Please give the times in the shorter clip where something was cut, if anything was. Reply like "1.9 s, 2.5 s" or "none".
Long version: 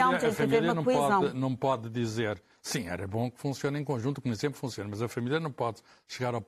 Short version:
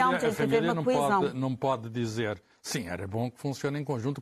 none